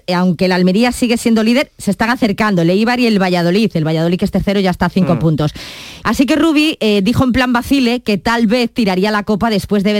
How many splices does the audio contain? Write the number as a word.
one